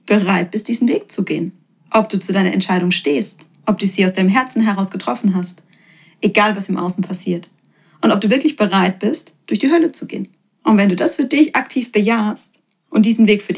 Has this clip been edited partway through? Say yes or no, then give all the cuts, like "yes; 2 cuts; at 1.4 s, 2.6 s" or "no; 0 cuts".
no; 0 cuts